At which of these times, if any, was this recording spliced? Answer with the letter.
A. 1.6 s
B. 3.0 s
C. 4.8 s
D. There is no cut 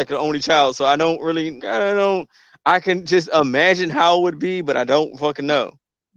A